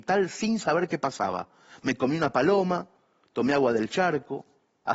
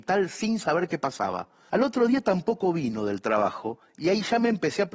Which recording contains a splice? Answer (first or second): second